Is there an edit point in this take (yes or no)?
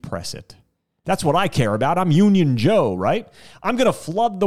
yes